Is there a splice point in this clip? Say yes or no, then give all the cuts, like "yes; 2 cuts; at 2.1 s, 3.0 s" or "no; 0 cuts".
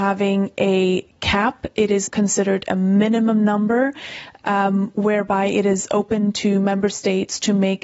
yes; 1 cut; at 2.1 s